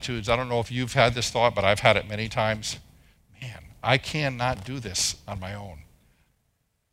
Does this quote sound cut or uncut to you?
uncut